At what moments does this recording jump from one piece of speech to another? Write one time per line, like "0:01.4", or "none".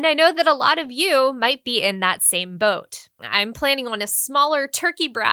0:03.2